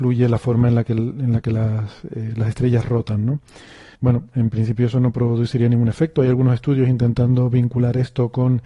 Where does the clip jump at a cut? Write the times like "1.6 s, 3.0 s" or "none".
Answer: 3.9 s